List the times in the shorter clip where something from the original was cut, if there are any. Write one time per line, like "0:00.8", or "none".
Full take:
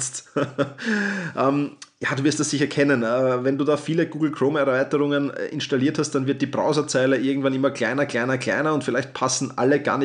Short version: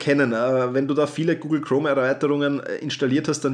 none